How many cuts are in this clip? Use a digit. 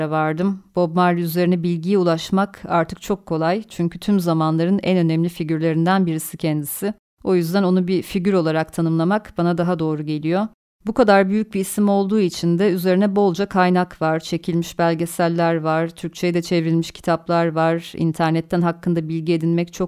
1